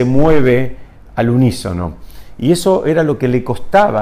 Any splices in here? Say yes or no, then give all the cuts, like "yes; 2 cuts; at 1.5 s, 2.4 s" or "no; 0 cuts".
no; 0 cuts